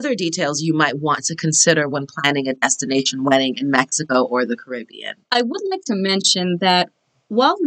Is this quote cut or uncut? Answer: cut